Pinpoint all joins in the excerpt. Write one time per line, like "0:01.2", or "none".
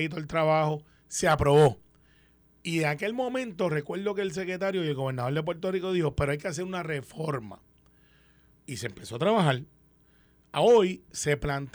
none

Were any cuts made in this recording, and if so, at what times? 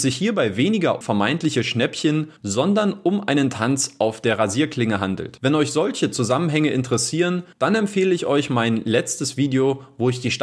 0:01.0

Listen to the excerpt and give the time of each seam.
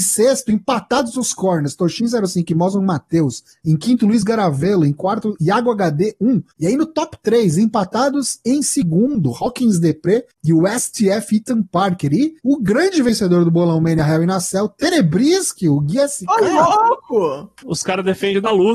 0:12.4
0:17.6

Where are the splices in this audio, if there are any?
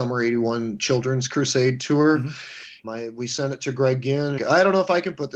0:02.8
0:04.4

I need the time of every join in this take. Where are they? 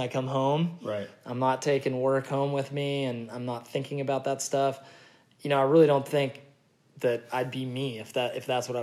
none

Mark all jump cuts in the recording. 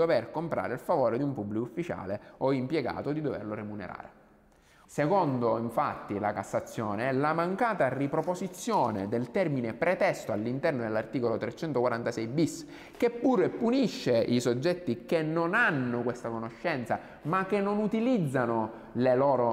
0:04.9

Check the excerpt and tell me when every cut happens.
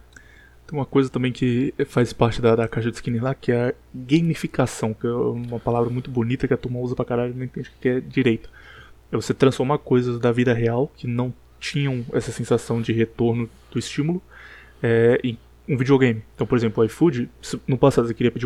0:12.8
0:16.3

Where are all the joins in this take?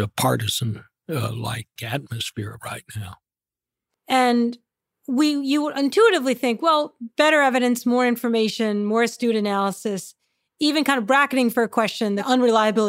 0:01.8
0:03.9

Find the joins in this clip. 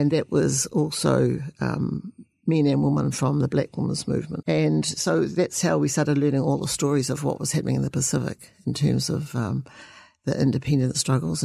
0:04.4

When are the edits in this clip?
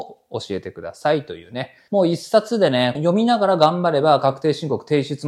0:01.9
0:03.0

